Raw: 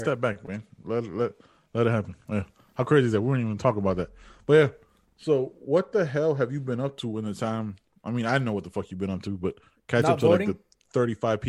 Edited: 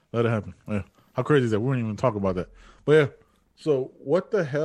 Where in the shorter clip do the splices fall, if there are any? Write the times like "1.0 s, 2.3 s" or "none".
none